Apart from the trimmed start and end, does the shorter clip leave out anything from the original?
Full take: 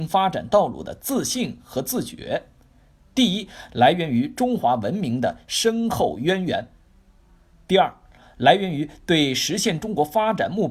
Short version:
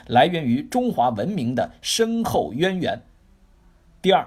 no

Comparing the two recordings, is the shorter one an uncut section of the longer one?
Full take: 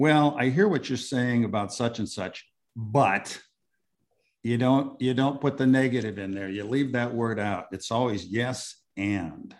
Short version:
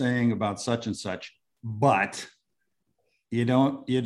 yes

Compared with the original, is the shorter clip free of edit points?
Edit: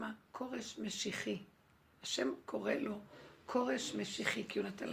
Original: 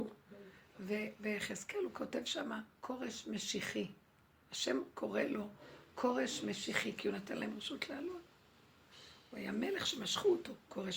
yes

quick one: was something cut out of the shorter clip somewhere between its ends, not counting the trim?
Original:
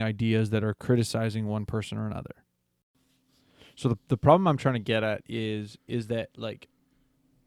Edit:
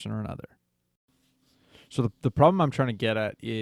no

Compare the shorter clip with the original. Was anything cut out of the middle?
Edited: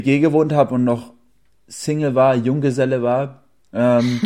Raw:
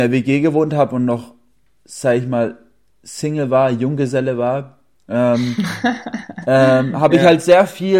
yes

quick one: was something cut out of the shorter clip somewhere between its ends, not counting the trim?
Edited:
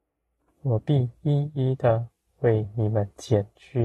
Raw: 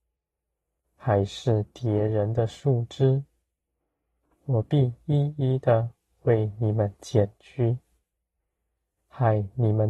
no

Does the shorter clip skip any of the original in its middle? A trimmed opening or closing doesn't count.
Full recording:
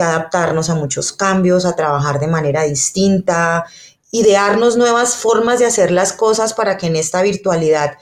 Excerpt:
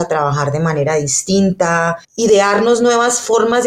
yes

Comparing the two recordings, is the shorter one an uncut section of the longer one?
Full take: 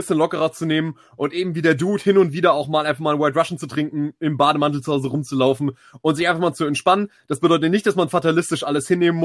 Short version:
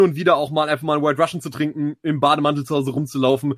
yes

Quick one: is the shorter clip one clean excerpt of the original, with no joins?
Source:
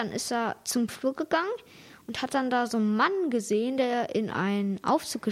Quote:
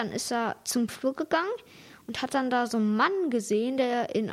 yes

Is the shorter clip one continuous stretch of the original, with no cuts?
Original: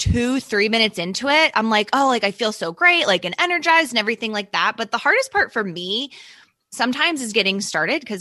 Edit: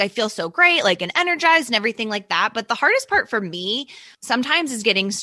no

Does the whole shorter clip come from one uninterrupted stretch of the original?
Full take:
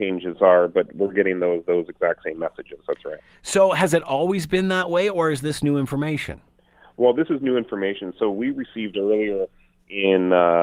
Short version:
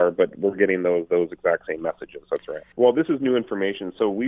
no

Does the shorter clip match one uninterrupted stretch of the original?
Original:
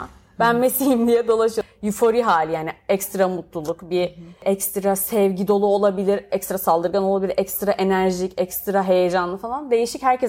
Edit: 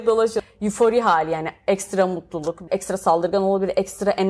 no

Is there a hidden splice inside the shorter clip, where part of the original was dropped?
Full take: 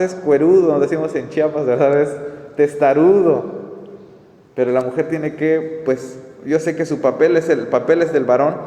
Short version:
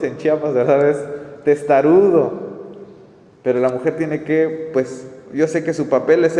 no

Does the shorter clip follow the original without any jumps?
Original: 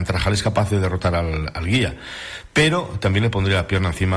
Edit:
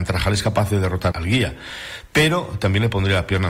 no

